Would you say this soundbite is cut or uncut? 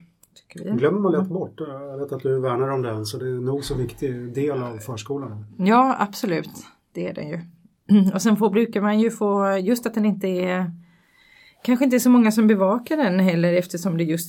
uncut